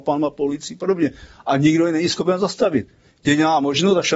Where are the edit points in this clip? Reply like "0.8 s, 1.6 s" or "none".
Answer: none